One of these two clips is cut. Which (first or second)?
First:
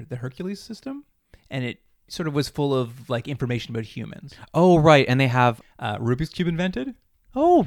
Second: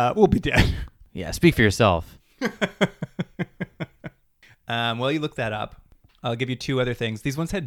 first